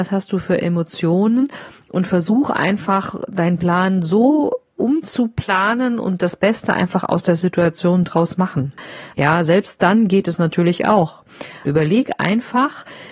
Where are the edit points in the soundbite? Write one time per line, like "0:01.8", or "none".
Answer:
0:09.1
0:11.7